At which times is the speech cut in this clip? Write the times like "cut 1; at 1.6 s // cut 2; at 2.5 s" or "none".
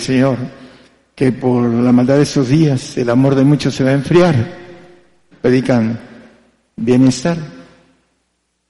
cut 1; at 5.3 s